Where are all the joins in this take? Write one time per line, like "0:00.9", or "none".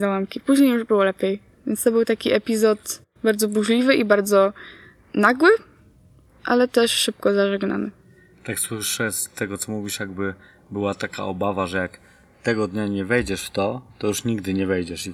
none